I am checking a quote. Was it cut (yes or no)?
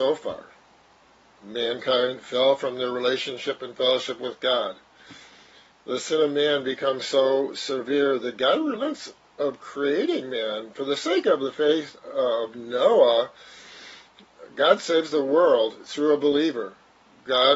no